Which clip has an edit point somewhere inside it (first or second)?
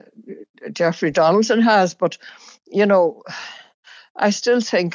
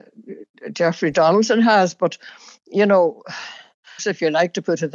second